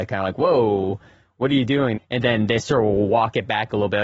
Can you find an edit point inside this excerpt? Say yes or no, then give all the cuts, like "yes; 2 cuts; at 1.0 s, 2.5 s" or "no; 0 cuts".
yes; 1 cut; at 1.9 s